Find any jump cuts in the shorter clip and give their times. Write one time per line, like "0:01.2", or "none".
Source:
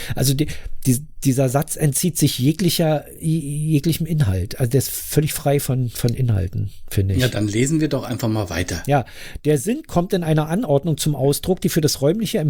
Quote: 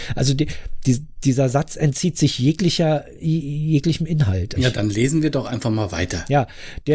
0:04.6